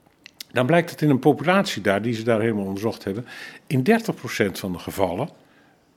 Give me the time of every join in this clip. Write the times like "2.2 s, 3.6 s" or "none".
none